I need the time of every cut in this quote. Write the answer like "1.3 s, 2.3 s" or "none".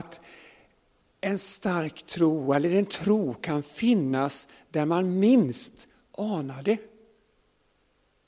none